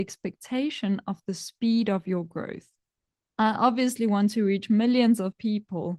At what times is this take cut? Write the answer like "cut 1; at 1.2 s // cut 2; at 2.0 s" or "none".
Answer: cut 1; at 3.2 s